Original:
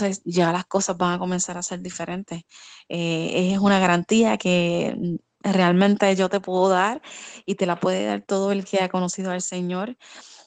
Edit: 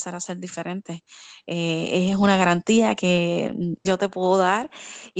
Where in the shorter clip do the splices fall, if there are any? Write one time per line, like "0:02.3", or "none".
0:03.9